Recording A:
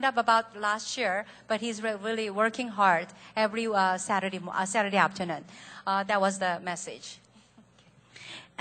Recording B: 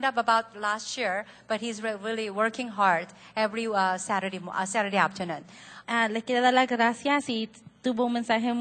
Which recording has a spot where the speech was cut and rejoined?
B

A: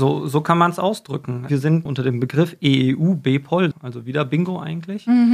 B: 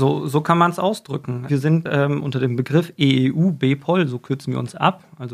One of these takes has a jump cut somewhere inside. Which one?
A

